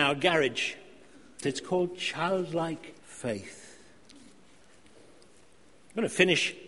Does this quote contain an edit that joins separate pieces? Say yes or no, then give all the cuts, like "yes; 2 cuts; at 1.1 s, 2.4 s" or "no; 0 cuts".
yes; 2 cuts; at 1.4 s, 3.0 s